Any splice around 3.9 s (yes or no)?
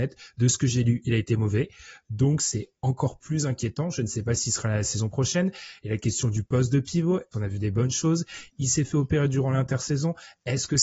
no